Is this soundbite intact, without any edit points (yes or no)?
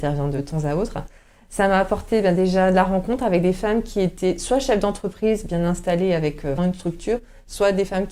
no